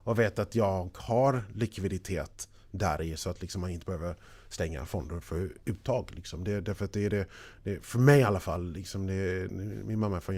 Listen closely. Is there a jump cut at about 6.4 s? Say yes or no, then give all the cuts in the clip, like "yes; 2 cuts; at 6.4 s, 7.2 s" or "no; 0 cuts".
no; 0 cuts